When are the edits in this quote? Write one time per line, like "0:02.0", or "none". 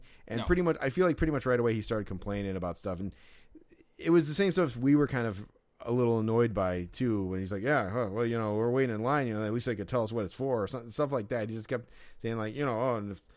none